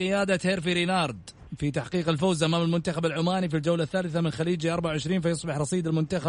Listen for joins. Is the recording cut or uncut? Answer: uncut